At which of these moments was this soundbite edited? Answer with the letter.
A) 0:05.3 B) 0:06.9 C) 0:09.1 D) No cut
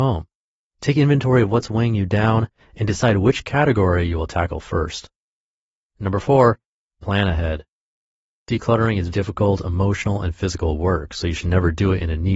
C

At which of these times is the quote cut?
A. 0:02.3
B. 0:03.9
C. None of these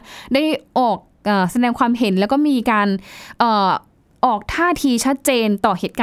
C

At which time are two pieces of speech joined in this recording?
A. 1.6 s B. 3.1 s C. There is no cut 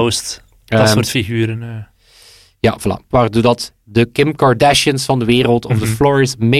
B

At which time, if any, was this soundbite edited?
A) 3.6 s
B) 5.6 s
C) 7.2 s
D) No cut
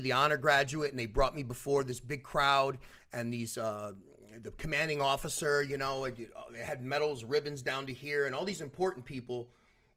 D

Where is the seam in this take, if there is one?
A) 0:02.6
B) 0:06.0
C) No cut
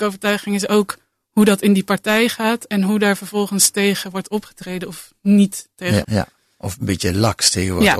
B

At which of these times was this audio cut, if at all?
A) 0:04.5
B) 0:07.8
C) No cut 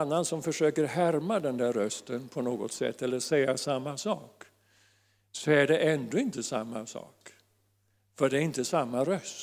C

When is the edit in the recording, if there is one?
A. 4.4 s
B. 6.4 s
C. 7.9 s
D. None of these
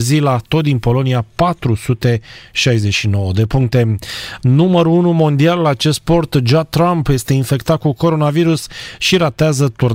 A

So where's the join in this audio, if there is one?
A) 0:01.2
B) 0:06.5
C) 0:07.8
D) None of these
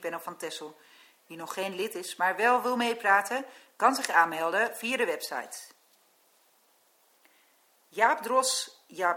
D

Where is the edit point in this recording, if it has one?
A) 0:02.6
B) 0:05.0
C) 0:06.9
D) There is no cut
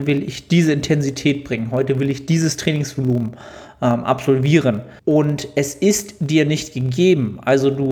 B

